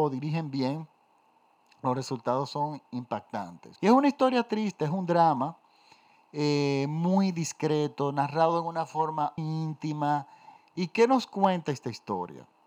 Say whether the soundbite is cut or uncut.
cut